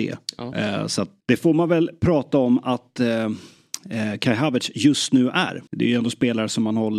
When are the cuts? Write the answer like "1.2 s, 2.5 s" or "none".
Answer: 1.2 s, 5.7 s